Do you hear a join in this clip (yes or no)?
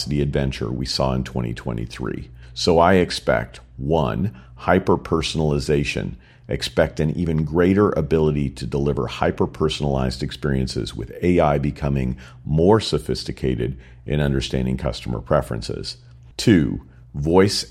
no